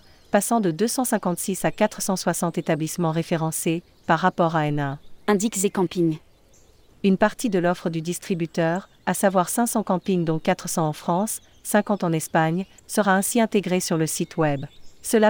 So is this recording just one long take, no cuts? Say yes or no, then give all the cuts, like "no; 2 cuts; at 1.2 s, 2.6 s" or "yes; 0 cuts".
no; 2 cuts; at 6.9 s, 12.8 s